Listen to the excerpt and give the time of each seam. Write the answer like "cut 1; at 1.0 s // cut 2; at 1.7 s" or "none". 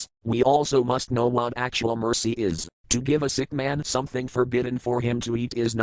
cut 1; at 2.8 s